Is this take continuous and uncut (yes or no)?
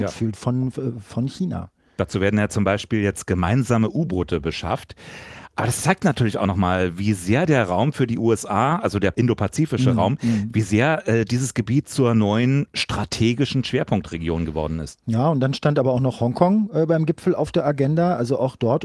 yes